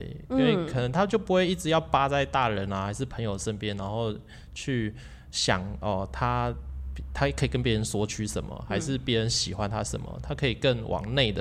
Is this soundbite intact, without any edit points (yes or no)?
yes